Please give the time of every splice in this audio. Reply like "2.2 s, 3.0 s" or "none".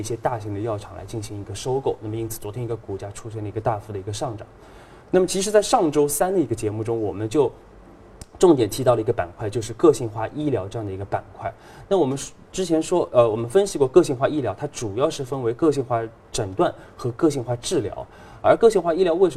11.9 s